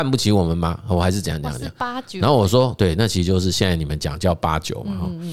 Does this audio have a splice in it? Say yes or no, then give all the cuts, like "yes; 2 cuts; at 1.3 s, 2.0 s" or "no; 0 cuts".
no; 0 cuts